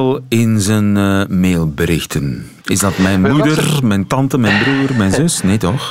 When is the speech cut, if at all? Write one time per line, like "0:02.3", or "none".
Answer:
none